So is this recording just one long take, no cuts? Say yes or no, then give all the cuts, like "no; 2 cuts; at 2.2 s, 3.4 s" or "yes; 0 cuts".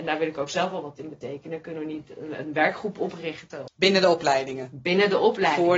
no; 1 cut; at 3.7 s